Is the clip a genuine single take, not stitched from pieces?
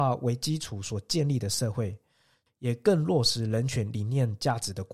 no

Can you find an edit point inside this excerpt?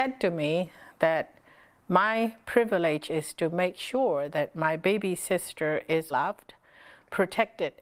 yes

